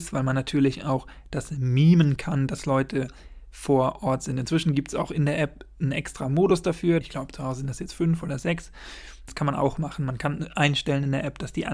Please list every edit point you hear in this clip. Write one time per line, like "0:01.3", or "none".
0:07.0
0:09.3